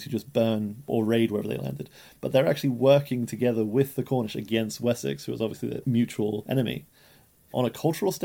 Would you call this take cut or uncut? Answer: uncut